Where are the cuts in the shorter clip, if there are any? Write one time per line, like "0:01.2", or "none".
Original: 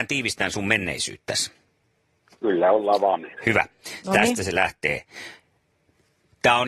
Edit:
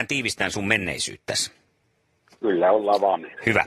none